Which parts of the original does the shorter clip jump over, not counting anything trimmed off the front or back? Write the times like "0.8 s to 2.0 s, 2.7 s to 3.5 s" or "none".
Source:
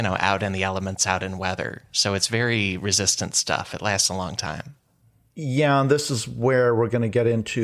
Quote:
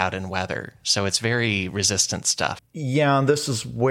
3.7 s to 5.2 s